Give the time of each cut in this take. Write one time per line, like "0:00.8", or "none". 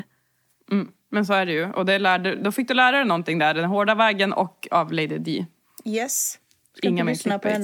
none